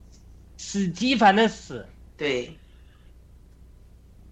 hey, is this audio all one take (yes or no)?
no